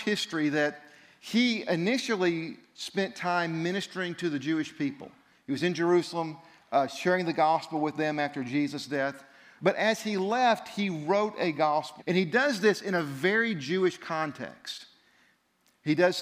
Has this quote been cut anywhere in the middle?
yes; 2 cuts; at 9.6 s, 12.0 s

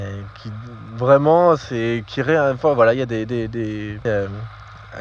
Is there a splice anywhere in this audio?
yes; 1 cut; at 4.1 s

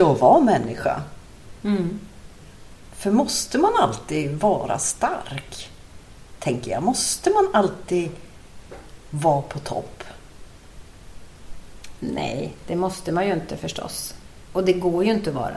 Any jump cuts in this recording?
no; 0 cuts

